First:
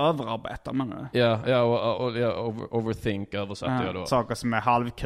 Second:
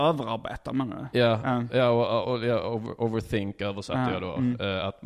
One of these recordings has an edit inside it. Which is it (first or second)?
first